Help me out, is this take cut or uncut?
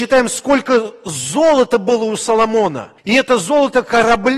cut